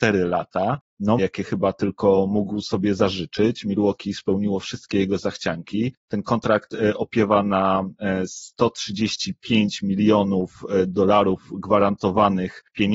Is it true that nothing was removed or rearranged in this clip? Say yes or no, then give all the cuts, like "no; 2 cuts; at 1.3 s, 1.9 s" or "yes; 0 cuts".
no; 1 cut; at 1.2 s